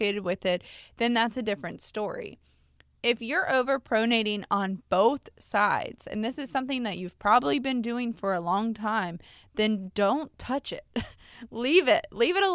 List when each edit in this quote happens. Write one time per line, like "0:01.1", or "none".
none

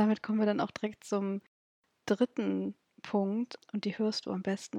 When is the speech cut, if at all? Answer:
0:03.6

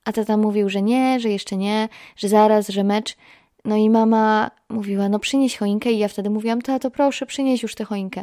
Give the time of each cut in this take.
0:06.6

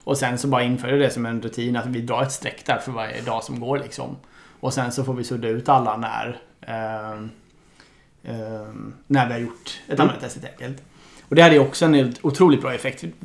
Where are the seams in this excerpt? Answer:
none

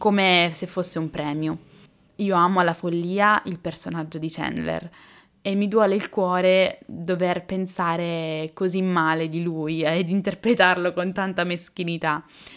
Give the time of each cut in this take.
0:02.1

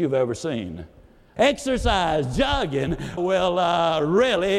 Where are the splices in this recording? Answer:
0:01.4
0:03.2

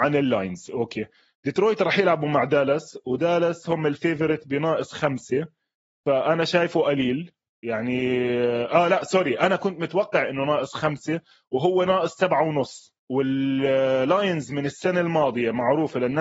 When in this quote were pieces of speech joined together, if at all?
0:13.0

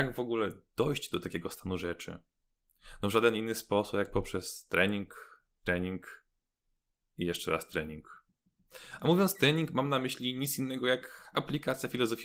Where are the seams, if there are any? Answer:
none

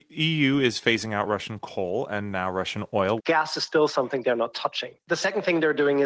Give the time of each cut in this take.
0:03.2

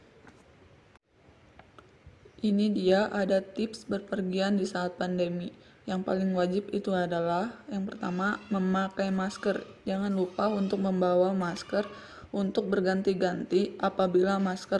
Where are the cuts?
none

